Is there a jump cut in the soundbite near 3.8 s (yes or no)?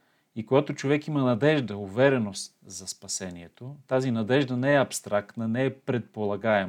no